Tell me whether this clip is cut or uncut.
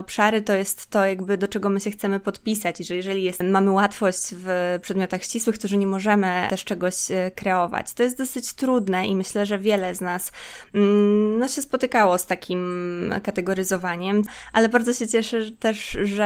uncut